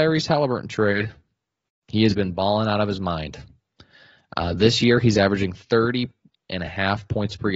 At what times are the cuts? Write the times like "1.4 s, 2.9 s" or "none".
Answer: none